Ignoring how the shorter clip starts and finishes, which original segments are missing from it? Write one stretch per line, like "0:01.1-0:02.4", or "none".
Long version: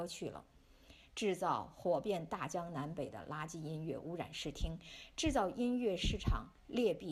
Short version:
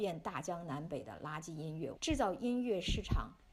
0:04.0-0:05.1